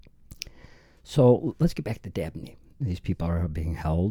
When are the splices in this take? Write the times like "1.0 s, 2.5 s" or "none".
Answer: 2.8 s